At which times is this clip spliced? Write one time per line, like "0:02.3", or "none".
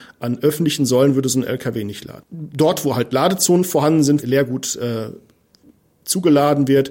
0:02.2
0:04.2

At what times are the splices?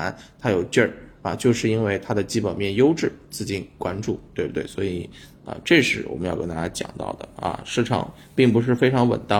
none

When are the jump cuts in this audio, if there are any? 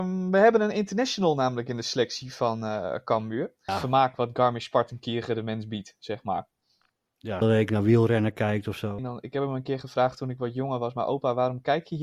0:03.7
0:07.4
0:09.0

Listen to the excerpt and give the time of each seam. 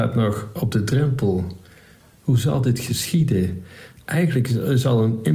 none

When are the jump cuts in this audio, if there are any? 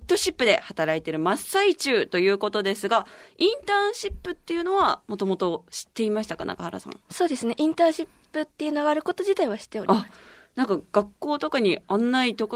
none

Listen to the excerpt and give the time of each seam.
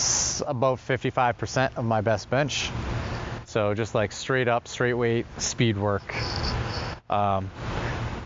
0:03.5

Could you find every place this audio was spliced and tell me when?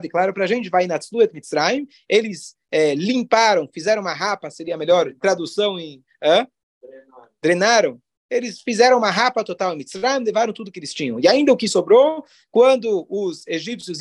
none

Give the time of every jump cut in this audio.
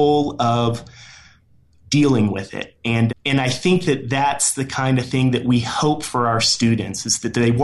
0:03.1

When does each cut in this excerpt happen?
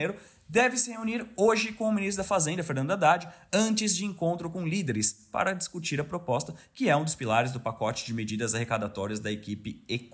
none

